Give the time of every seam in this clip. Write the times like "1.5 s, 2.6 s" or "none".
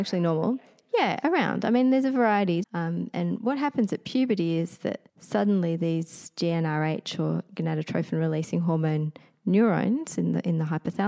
2.6 s, 5.1 s